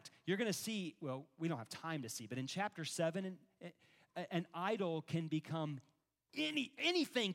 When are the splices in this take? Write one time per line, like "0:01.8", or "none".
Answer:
none